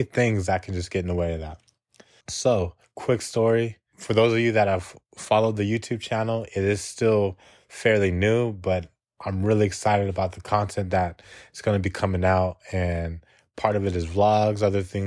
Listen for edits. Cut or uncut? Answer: cut